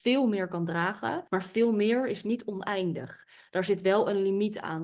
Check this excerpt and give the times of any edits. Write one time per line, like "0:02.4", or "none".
0:01.3

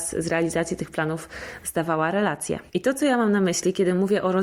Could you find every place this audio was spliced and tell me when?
0:02.7

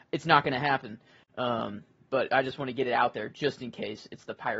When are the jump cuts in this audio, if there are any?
none

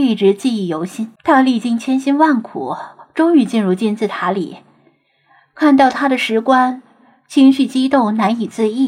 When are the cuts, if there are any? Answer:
0:01.2

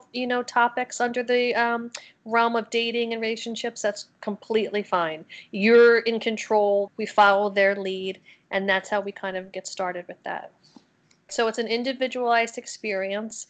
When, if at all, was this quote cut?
0:06.9
0:11.3

